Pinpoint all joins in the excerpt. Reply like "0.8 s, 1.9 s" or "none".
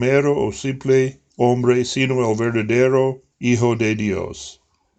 1.3 s, 3.3 s